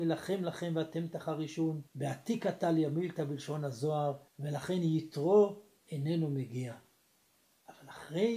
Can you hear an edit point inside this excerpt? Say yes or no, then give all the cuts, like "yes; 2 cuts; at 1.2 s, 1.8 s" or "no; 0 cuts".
yes; 2 cuts; at 1.9 s, 4.3 s